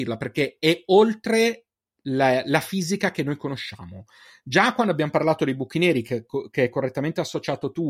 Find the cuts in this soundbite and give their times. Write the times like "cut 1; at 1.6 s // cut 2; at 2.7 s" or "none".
none